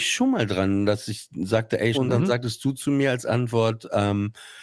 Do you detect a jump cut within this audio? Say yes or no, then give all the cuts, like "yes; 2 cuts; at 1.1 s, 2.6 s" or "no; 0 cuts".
yes; 1 cut; at 1.9 s